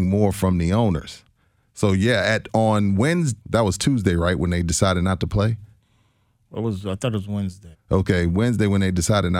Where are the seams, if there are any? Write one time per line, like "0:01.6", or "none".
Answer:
0:03.4
0:07.7